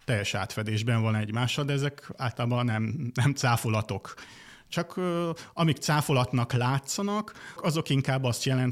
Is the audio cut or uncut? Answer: cut